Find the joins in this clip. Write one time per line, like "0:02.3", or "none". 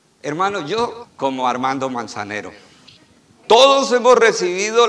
0:01.0
0:03.4